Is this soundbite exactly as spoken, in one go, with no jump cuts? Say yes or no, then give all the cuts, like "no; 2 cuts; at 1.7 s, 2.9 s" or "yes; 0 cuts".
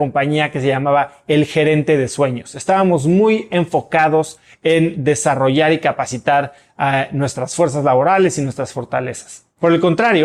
yes; 0 cuts